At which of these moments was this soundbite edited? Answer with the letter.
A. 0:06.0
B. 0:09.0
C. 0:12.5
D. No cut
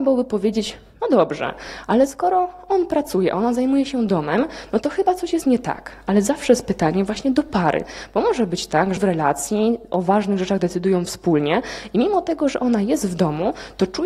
B